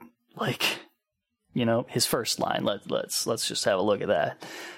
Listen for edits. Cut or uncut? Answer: uncut